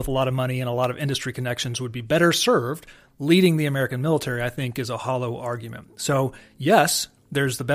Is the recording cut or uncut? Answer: uncut